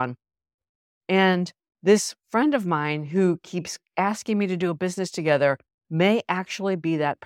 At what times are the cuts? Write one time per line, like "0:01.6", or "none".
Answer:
0:01.0
0:05.8